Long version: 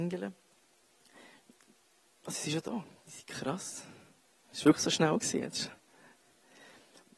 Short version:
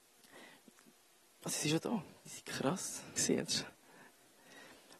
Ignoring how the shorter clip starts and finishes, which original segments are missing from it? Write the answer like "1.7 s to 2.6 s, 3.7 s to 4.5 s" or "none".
4.0 s to 5.2 s